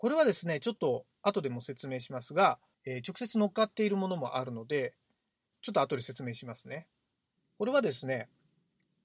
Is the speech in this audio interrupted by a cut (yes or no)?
yes